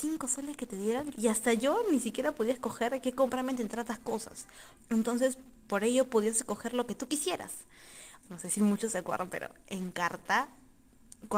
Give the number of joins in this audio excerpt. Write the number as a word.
three